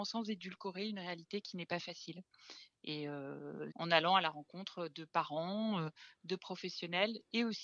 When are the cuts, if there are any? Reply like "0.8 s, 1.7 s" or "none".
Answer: 3.7 s